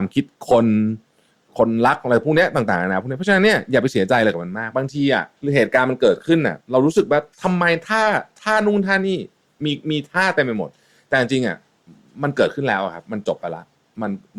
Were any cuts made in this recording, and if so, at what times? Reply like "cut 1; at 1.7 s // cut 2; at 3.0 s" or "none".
cut 1; at 7.3 s